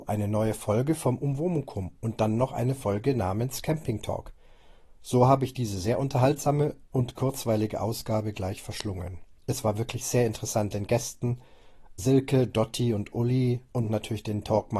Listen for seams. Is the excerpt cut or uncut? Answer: cut